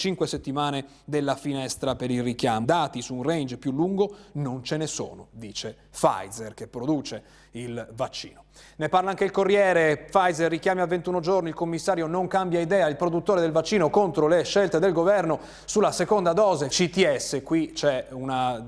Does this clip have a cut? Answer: yes; 2 cuts; at 2.6 s, 16.7 s

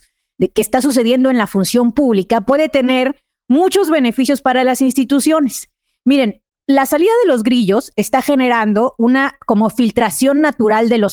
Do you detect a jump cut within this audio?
no; 0 cuts

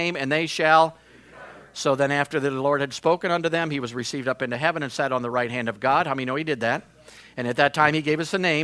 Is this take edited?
no; 0 cuts

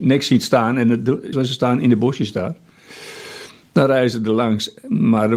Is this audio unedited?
no; 1 cut; at 1.3 s

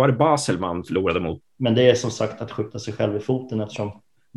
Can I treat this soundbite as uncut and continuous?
no; 1 cut; at 1.4 s

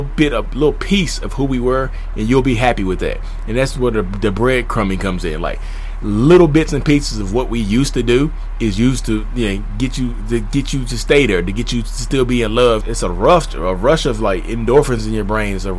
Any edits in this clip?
yes; 1 cut; at 12.8 s

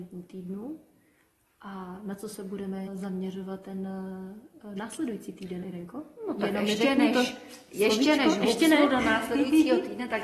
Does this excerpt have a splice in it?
yes; 1 cut; at 2.9 s

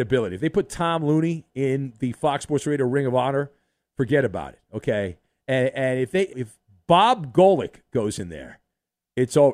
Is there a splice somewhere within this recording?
yes; 1 cut; at 6.3 s

